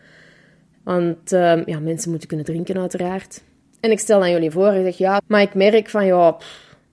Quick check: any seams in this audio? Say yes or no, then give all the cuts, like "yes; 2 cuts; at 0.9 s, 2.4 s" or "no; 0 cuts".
yes; 1 cut; at 5.2 s